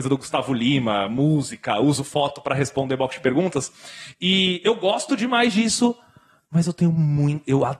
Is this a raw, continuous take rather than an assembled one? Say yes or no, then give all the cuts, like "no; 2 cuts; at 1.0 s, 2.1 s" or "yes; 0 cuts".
yes; 0 cuts